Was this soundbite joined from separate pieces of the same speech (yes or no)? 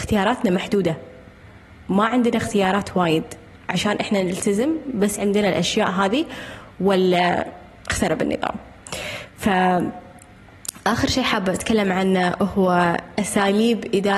no